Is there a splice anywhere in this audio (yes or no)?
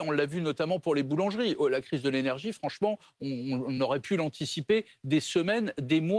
no